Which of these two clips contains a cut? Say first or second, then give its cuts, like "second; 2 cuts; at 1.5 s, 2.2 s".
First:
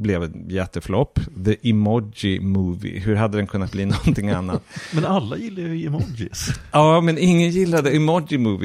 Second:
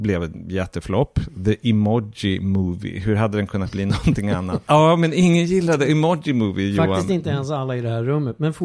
second; 1 cut; at 4.7 s